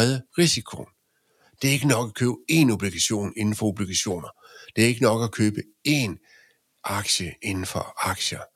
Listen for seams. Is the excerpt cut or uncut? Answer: uncut